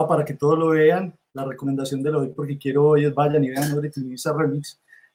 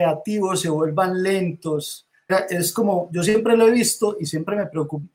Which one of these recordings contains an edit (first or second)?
second